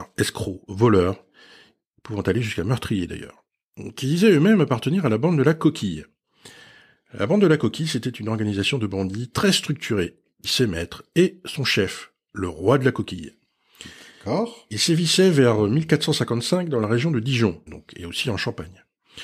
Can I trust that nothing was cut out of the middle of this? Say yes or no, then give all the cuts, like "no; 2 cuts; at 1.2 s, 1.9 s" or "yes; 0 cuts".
no; 2 cuts; at 10.4 s, 17.7 s